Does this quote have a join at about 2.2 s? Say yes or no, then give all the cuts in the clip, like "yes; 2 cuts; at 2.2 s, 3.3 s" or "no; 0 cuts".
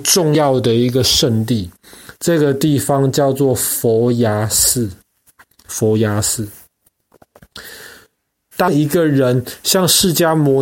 no; 2 cuts; at 5.7 s, 8.5 s